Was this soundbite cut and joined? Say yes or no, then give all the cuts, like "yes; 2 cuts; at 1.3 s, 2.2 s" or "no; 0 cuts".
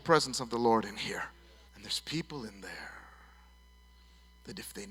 yes; 1 cut; at 1.7 s